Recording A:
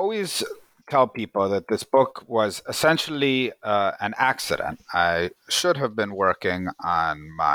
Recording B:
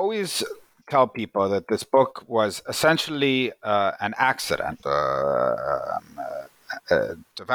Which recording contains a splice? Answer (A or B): B